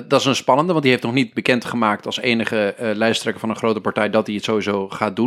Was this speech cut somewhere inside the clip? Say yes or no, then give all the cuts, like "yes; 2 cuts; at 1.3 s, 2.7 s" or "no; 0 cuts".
no; 0 cuts